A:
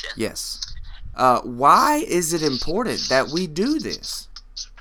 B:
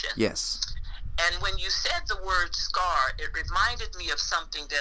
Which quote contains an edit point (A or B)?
A